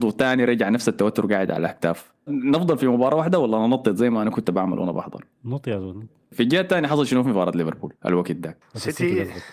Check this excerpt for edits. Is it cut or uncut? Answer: cut